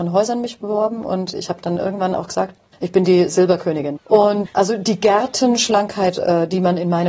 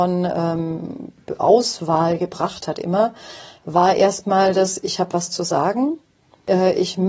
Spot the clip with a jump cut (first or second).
first